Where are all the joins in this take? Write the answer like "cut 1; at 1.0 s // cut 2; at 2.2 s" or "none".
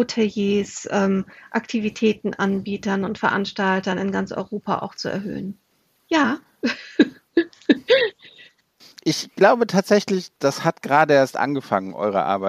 cut 1; at 6.0 s